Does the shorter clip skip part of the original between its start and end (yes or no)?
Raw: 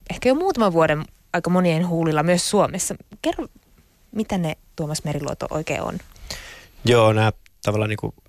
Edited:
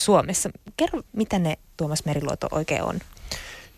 yes